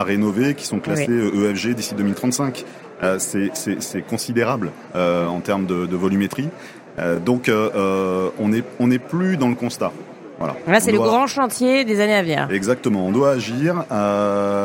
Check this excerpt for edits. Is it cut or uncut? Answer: uncut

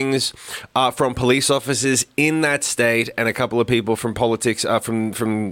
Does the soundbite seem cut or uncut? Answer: uncut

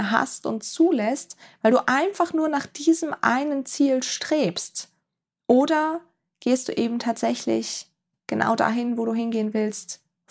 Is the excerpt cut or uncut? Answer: uncut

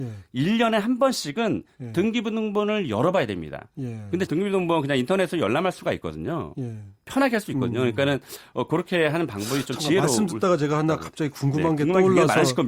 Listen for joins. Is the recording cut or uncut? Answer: cut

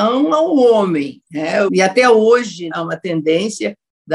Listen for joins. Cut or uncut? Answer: cut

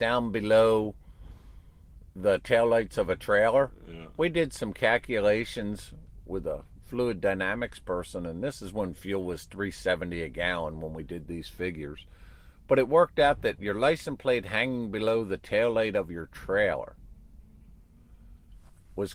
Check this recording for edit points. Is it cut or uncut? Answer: uncut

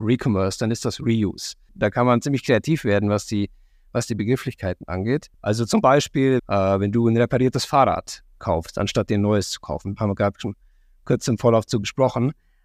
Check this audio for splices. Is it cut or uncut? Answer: cut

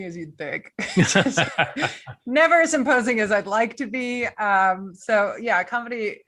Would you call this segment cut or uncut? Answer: uncut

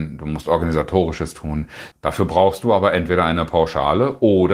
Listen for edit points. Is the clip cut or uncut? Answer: cut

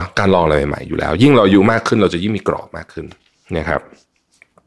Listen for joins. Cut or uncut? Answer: uncut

